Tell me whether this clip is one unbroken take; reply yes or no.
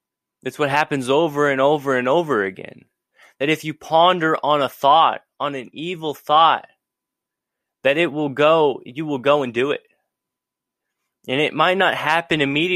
yes